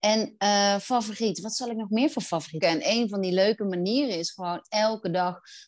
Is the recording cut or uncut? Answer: cut